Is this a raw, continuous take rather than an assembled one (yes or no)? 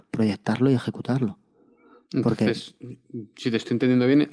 yes